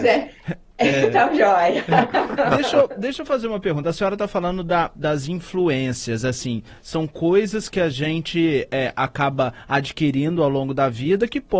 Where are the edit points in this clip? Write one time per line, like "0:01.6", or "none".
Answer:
none